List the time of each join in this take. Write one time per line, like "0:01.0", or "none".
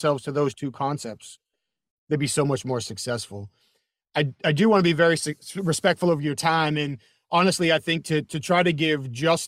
none